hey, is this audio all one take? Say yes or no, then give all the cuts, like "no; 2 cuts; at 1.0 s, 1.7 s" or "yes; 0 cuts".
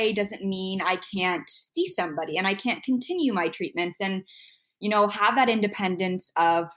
yes; 0 cuts